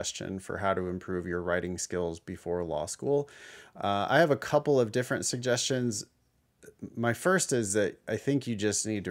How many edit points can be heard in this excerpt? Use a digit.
0